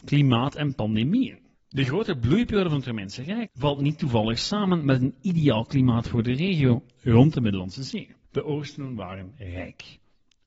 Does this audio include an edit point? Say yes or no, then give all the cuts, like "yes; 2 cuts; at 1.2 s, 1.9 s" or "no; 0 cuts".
yes; 3 cuts; at 1.5 s, 3.5 s, 8.2 s